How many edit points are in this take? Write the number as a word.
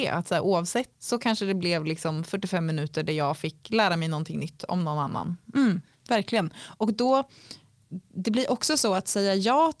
one